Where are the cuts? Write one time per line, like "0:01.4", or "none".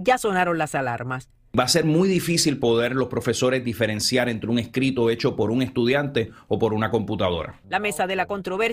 none